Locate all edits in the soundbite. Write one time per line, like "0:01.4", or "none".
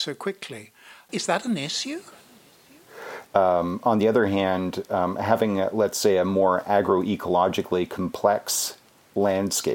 0:03.3